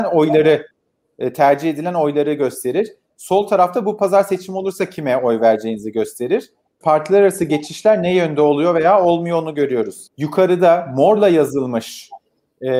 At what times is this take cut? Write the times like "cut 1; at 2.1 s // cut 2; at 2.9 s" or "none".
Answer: cut 1; at 6.8 s // cut 2; at 10.1 s